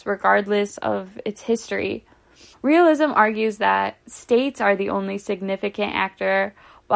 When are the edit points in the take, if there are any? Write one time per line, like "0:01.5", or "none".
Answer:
0:02.5